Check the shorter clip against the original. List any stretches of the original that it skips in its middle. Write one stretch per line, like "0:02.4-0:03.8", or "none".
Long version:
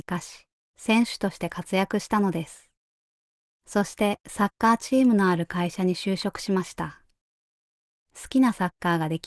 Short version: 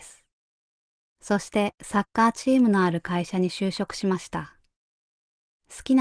none